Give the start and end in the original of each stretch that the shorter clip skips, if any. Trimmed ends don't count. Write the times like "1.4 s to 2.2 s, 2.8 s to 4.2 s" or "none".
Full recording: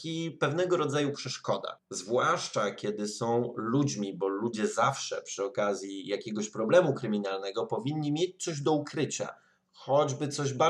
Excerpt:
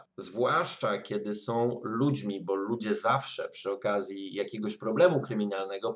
none